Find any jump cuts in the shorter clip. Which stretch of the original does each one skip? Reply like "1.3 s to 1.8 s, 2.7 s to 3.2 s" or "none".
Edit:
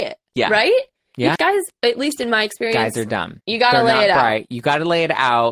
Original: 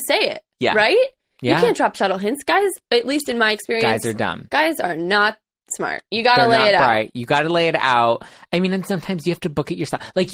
1.6 s to 2.4 s, 4.5 s to 6.1 s